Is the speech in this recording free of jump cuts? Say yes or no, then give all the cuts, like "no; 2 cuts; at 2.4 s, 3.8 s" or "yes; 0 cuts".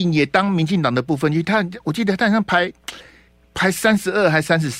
yes; 0 cuts